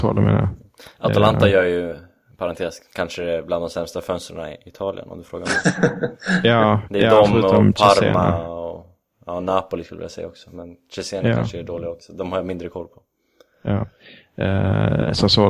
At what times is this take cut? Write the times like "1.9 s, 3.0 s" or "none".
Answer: none